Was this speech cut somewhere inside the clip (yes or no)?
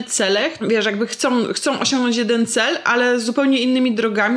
no